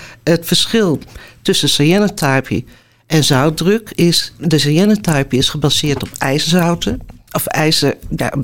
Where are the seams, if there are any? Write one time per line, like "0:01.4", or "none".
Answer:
none